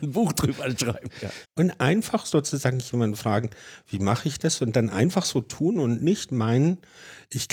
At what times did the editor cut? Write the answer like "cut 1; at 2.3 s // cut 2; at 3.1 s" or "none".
cut 1; at 1.4 s